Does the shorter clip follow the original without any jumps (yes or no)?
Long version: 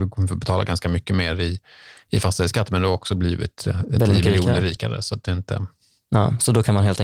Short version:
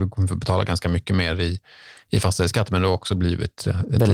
yes